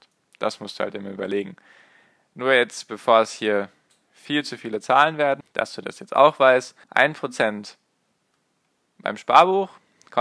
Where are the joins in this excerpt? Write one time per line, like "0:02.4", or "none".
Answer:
0:05.4
0:06.8